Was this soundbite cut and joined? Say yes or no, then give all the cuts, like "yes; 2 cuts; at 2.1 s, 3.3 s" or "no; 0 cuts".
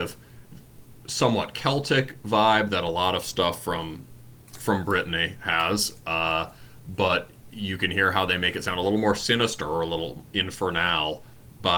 no; 0 cuts